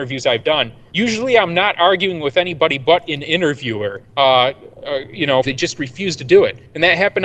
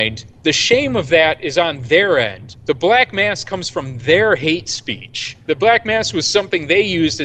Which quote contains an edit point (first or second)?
first